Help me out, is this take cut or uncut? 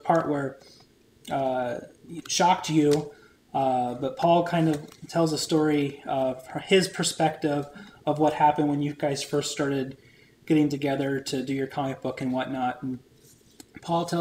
uncut